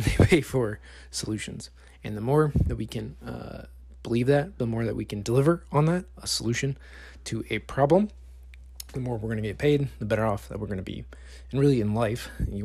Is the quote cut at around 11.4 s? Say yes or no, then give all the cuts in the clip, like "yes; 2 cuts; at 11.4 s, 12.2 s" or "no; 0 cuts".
no; 0 cuts